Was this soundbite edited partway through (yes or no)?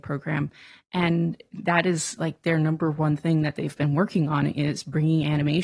no